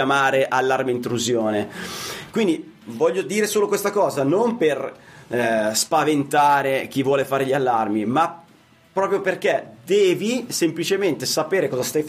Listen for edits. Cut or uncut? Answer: uncut